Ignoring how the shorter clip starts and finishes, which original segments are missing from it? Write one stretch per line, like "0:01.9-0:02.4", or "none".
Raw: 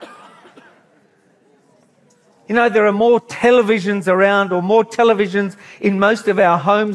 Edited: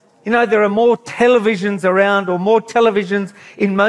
none